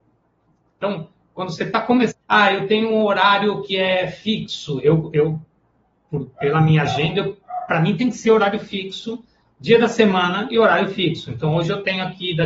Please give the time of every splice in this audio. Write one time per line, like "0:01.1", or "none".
0:02.1